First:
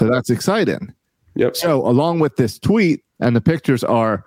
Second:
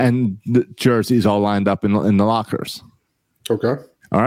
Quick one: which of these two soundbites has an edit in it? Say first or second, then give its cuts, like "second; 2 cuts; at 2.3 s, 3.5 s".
first; 1 cut; at 3.1 s